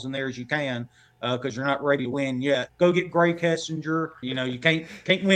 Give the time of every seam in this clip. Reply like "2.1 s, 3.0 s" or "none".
2.7 s, 4.2 s